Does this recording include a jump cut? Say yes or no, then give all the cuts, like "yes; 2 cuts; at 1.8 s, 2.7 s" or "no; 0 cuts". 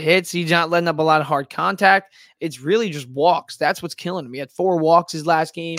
no; 0 cuts